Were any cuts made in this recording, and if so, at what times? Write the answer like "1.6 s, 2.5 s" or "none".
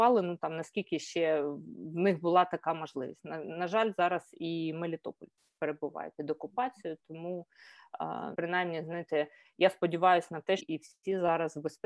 8.3 s, 10.6 s